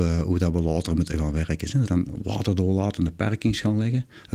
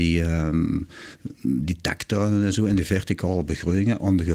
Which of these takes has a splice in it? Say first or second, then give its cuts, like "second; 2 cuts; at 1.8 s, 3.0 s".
first; 1 cut; at 1.8 s